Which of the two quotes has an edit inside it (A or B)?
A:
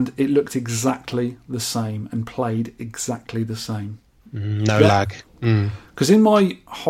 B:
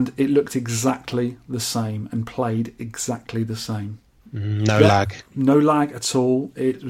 A